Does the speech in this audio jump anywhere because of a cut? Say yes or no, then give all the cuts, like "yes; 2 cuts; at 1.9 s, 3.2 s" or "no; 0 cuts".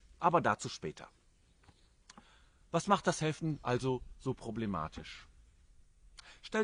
no; 0 cuts